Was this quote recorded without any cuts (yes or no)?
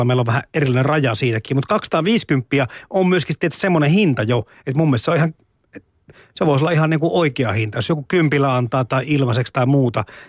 yes